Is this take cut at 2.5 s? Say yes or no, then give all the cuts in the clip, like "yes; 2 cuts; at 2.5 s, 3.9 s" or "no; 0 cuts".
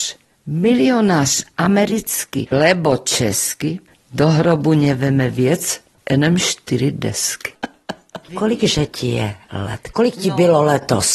yes; 1 cut; at 2.5 s